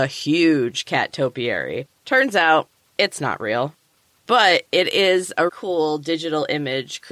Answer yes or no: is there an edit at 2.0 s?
yes